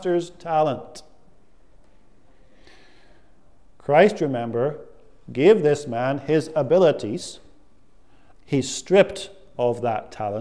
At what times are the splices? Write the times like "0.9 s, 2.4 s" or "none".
8.3 s